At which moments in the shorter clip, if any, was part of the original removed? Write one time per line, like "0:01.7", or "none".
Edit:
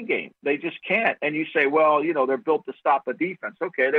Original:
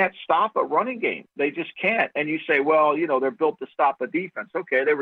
none